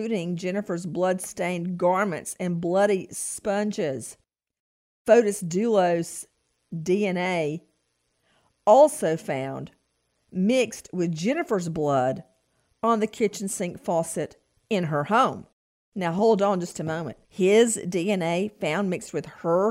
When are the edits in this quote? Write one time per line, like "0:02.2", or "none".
0:17.2